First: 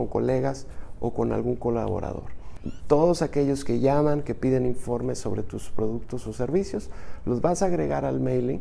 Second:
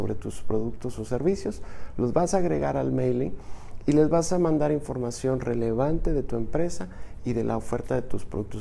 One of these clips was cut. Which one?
first; 1 cut; at 2.8 s

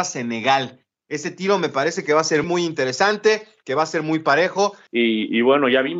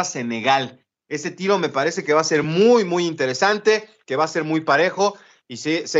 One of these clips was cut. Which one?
first; 2 cuts; at 2.4 s, 4.9 s

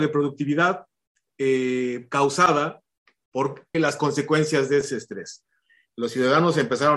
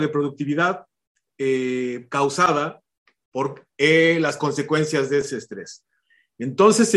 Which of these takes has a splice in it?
first; 2 cuts; at 3.7 s, 5.9 s

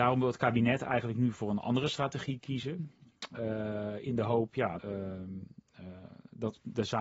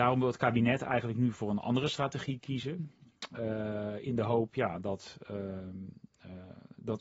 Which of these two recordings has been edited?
first; 1 cut; at 4.8 s

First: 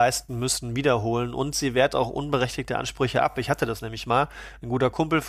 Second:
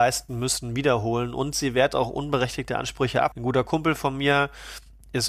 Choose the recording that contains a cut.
second; 1 cut; at 3.3 s

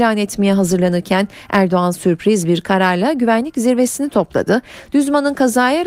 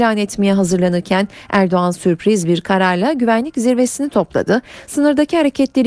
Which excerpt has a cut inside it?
first; 1 cut; at 4.9 s

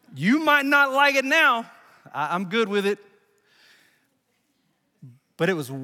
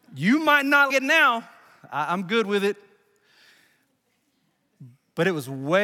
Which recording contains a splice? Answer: second; 1 cut; at 0.9 s

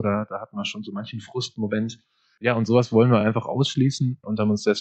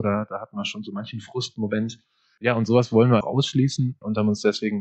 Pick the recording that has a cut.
second; 1 cut; at 3.2 s

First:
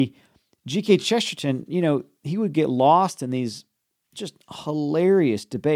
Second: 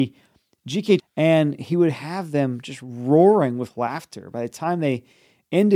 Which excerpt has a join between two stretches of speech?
second; 1 cut; at 1.0 s

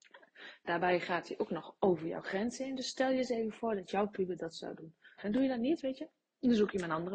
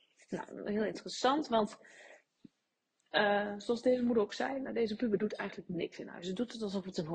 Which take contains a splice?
first; 1 cut; at 5.2 s

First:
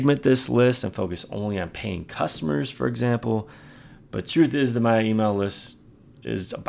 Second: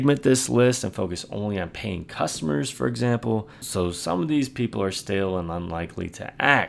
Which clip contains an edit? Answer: second; 1 cut; at 3.6 s

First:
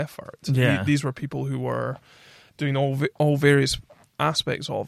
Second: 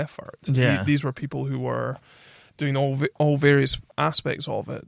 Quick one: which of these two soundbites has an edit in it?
second; 1 cut; at 3.9 s

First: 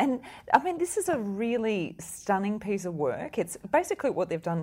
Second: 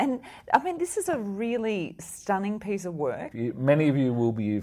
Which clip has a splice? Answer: second; 1 cut; at 3.3 s

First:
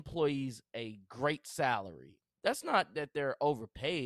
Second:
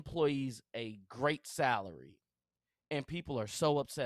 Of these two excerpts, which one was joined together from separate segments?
first; 1 cut; at 2.4 s

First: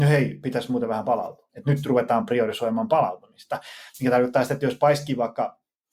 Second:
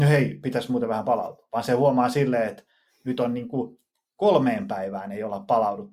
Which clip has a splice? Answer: first; 1 cut; at 1.5 s

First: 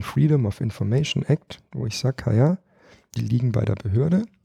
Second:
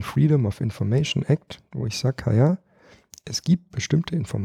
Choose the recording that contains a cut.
first; 1 cut; at 3.2 s

